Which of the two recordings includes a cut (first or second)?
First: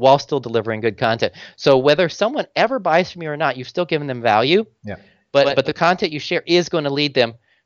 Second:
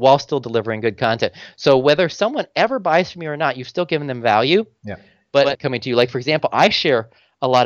second